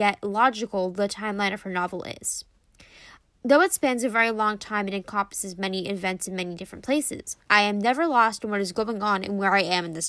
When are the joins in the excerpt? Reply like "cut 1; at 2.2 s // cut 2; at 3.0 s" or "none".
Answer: none